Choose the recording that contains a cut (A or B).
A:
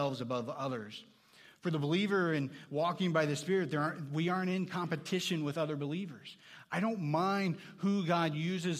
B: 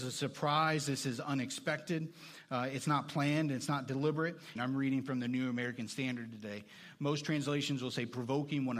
B